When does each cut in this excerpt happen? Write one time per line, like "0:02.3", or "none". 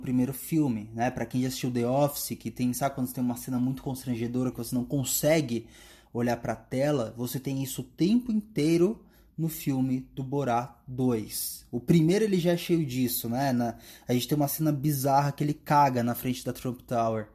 0:04.5

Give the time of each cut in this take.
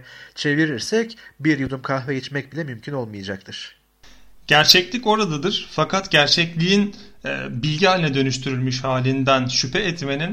none

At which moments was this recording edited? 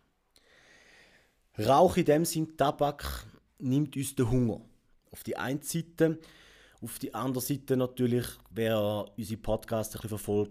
0:05.0

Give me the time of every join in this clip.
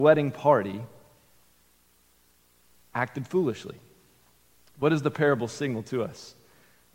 none

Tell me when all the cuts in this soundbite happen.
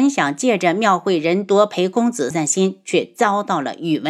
0:02.3

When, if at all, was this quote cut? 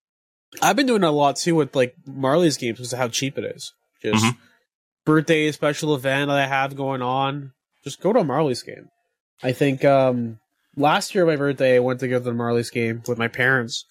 none

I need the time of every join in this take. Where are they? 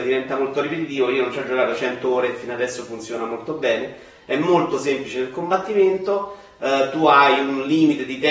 none

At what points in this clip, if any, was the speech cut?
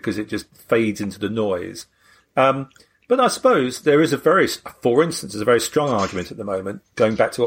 none

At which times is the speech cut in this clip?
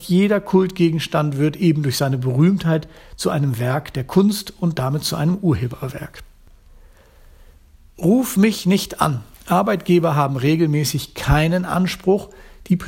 0:09.3

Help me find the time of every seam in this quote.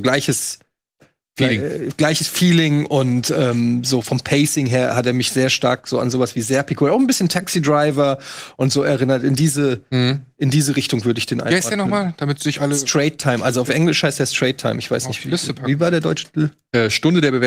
0:04.0

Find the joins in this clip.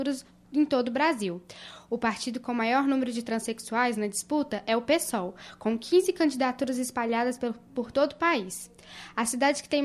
none

